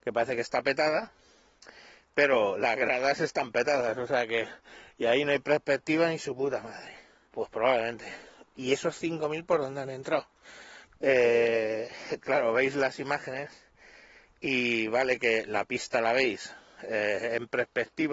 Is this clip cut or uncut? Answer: cut